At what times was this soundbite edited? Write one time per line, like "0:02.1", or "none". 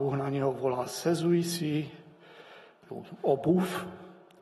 0:02.8